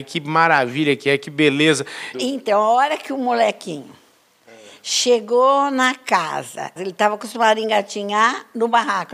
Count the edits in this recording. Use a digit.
2